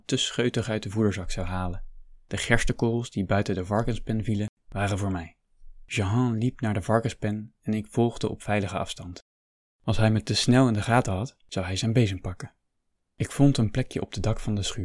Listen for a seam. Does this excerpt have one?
no; 0 cuts

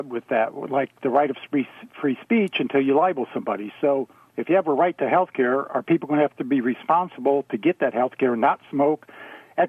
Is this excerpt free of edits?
yes; 0 cuts

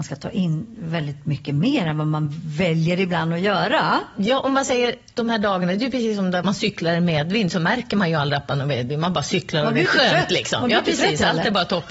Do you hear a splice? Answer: yes; 1 cut; at 6.4 s

